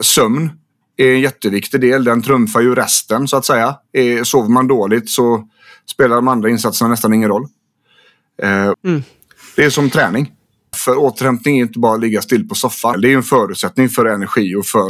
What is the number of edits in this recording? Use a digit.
3